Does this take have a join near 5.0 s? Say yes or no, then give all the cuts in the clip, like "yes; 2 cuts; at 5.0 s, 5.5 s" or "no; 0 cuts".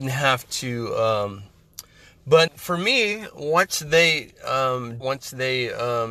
yes; 2 cuts; at 2.5 s, 5.0 s